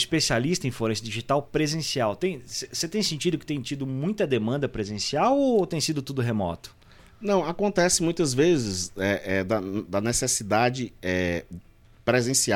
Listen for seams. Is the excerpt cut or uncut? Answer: uncut